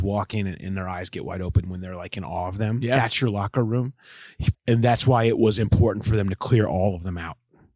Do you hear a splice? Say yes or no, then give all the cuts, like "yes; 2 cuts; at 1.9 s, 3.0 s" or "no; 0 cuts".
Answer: yes; 1 cut; at 4.5 s